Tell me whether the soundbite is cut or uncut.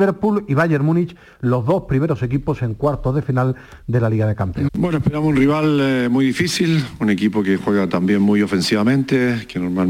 cut